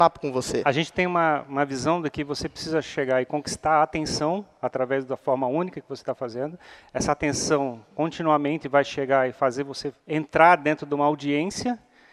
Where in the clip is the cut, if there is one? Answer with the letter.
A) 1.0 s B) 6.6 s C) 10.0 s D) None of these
C